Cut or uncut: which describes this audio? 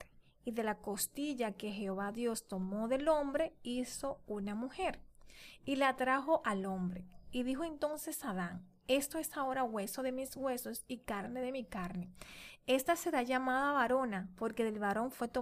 uncut